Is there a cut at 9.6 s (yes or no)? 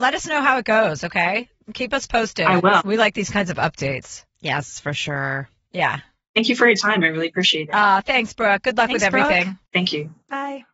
yes